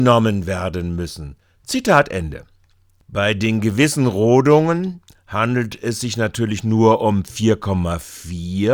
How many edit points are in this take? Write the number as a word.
zero